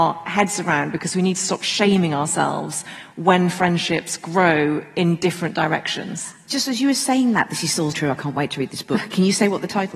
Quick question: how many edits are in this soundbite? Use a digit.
1